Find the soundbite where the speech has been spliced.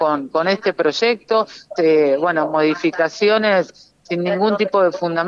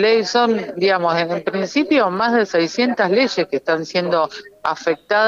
first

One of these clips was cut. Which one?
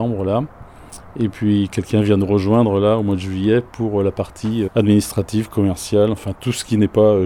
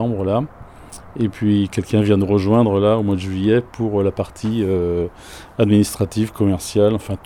first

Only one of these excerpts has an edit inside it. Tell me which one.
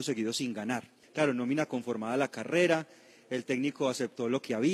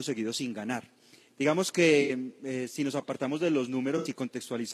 first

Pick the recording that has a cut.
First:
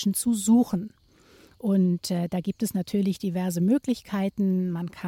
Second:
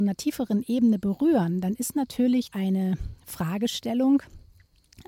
second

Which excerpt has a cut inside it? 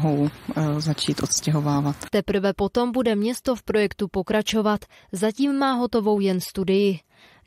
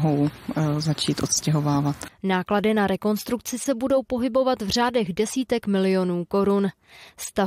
second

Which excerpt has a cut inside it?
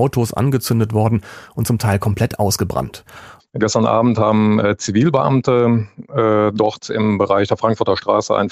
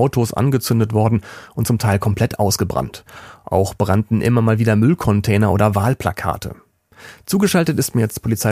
first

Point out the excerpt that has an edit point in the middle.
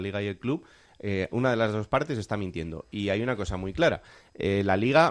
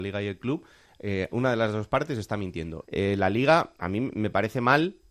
second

